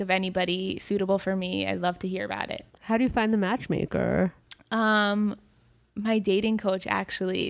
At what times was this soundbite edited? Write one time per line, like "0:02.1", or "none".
none